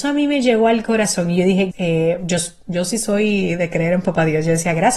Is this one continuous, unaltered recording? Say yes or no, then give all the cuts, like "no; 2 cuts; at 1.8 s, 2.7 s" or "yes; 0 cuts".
no; 1 cut; at 1.7 s